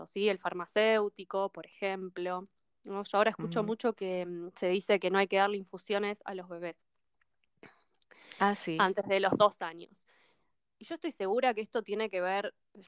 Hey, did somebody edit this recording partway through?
no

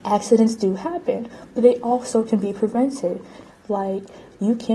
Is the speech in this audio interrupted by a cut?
yes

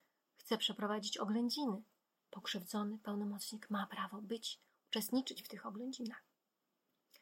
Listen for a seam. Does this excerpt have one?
no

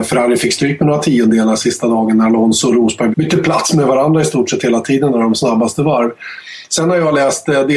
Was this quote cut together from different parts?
yes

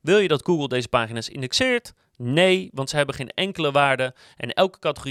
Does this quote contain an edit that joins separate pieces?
no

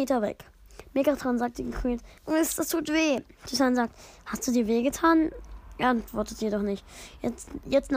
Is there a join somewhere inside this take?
yes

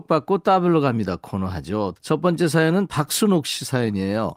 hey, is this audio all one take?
no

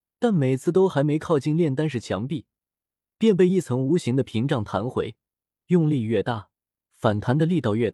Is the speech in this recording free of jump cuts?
yes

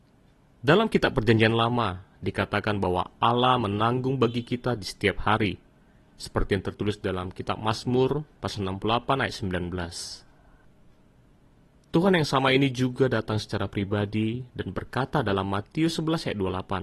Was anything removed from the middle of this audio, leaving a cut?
no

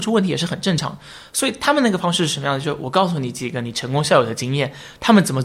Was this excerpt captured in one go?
yes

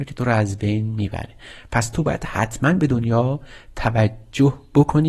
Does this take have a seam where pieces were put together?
no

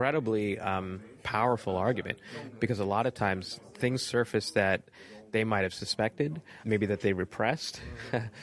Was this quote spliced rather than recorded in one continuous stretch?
yes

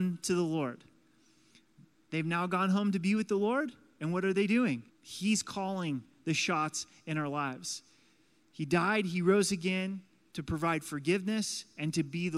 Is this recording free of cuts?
no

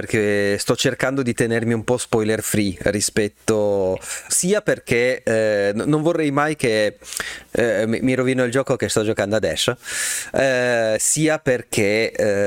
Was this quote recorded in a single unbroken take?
no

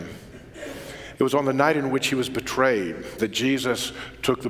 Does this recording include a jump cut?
yes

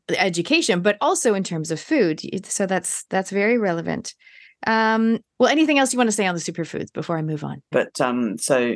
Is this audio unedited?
no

